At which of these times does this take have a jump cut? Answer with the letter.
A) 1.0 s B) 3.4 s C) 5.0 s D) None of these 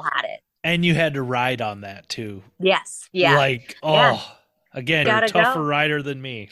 C